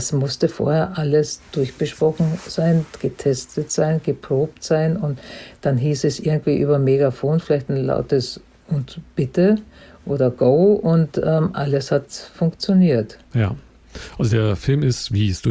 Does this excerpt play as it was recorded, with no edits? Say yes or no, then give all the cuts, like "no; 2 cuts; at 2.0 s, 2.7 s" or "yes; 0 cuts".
yes; 0 cuts